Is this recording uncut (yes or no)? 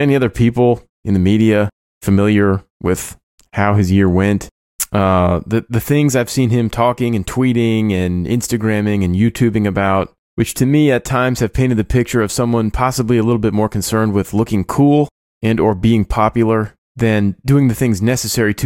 yes